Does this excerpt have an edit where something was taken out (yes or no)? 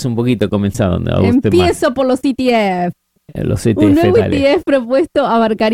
no